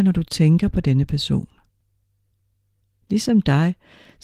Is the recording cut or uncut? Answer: cut